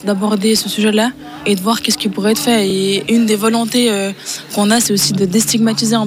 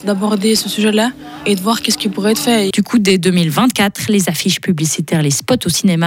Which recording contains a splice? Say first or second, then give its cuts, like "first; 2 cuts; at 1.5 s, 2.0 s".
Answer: second; 1 cut; at 2.7 s